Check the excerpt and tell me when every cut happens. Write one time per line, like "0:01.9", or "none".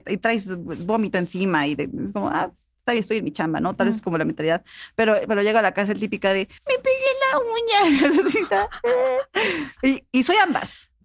0:06.6